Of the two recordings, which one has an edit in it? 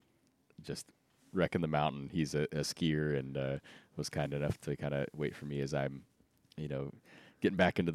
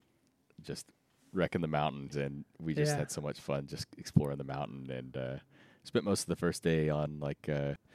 second; 1 cut; at 2.1 s

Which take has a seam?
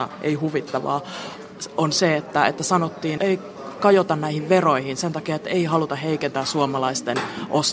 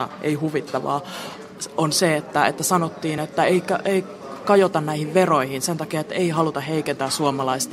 first; 1 cut; at 3.2 s

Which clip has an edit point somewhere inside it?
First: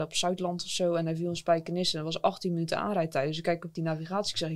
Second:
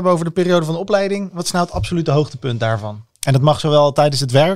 second; 1 cut; at 3.1 s

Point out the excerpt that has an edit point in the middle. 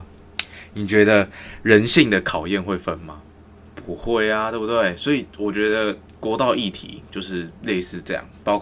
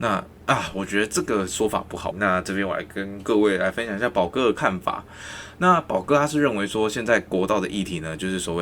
second; 1 cut; at 2.1 s

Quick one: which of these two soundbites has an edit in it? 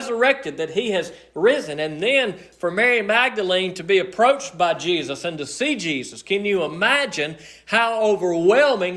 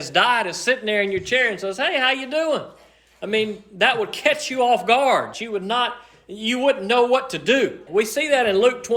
second; 2 cuts; at 5.3 s, 7.9 s

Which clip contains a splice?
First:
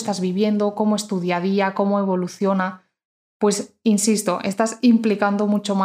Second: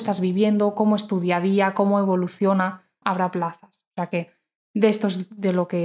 second; 1 cut; at 3.0 s

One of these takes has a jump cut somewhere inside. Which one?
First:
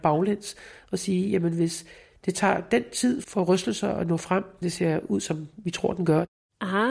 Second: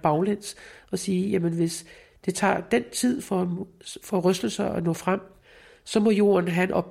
first; 2 cuts; at 3.2 s, 4.6 s

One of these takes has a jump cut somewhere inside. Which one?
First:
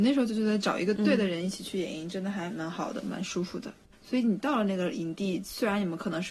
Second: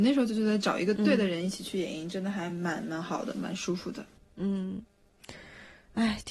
first; 2 cuts; at 2.5 s, 3.9 s

